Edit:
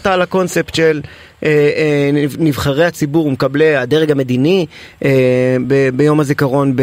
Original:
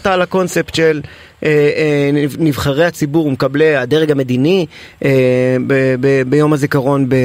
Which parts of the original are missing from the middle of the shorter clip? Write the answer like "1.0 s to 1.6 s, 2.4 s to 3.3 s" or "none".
5.6 s to 6.0 s